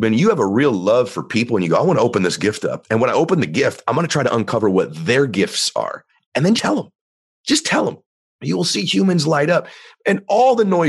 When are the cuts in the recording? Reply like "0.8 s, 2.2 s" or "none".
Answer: 6.5 s